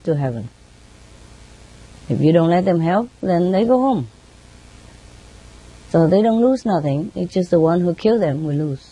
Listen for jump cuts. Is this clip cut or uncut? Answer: uncut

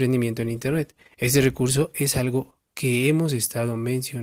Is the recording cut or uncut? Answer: uncut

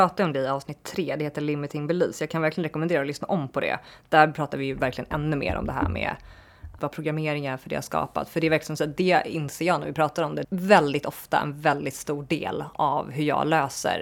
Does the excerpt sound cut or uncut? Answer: cut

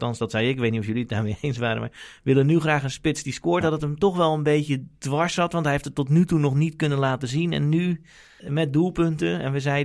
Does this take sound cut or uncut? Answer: cut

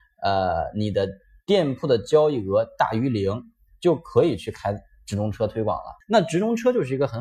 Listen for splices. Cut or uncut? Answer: cut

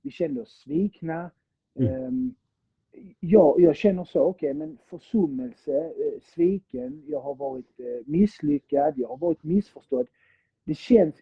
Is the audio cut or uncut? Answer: uncut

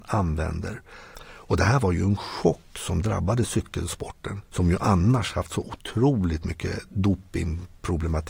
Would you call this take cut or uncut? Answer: cut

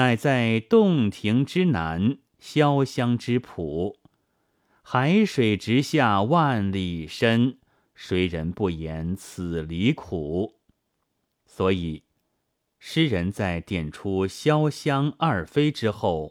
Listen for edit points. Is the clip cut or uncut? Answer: cut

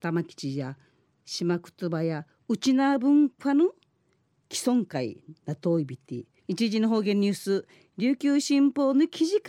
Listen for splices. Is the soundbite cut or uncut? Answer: cut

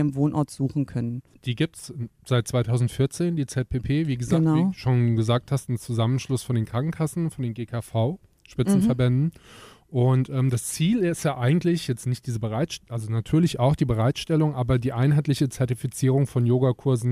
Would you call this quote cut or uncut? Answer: uncut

